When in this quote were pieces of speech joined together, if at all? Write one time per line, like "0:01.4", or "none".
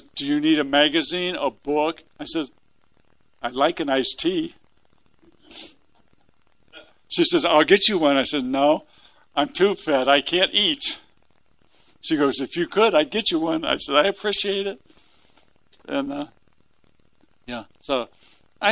0:02.1